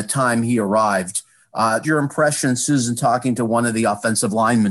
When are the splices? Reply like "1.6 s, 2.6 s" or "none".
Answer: 1.8 s